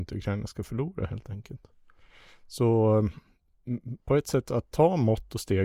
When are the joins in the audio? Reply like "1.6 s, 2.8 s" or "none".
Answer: none